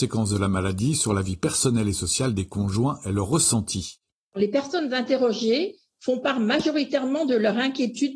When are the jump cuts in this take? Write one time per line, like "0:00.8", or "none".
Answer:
none